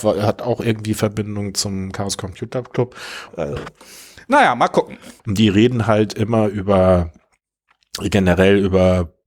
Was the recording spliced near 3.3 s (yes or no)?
yes